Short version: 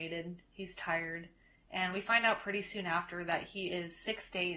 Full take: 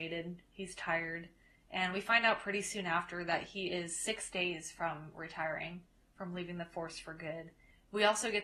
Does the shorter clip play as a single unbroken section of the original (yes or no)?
yes